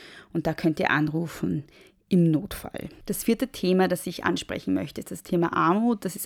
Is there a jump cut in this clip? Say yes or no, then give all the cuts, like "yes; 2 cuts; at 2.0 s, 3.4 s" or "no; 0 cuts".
no; 0 cuts